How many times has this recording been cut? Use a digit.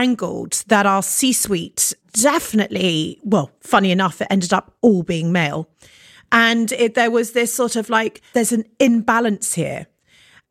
1